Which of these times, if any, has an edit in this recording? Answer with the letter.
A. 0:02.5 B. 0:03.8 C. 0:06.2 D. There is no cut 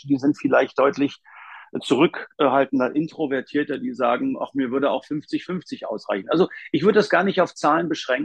D